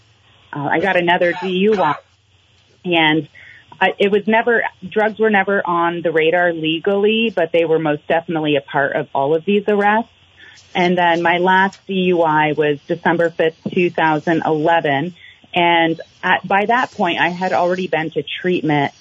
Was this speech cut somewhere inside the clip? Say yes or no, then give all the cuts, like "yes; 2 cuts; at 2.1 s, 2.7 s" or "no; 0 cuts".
no; 0 cuts